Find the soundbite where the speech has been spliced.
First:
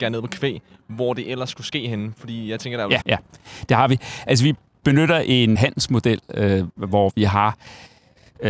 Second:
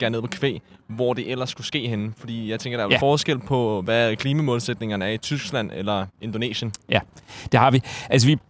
first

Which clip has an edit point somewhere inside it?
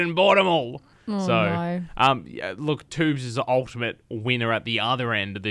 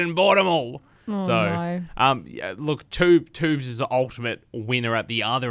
first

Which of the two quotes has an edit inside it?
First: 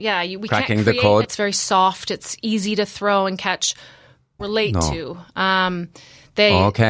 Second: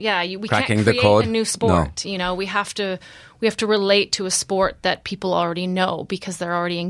first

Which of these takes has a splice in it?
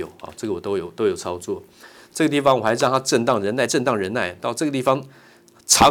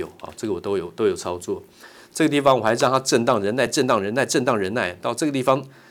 first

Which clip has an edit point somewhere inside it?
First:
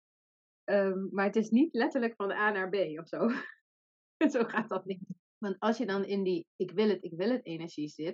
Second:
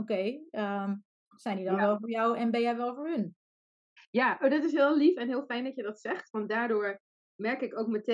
first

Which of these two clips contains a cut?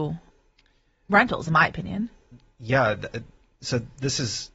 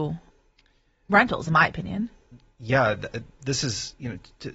second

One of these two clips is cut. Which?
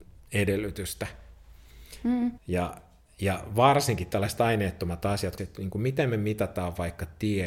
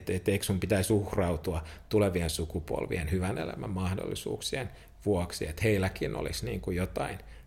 first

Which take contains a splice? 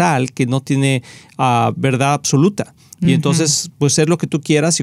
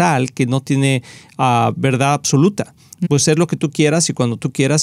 second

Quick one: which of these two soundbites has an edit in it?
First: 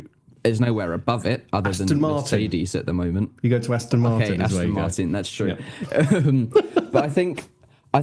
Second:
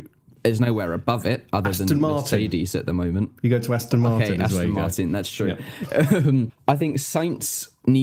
second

